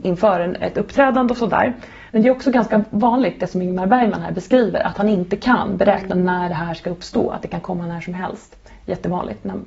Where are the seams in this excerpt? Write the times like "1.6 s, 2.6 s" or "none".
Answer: 2.1 s